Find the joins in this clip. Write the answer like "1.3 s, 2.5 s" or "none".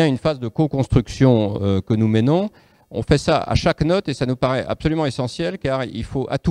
none